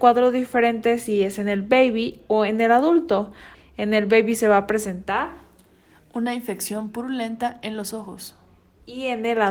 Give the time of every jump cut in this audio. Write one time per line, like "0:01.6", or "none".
0:03.5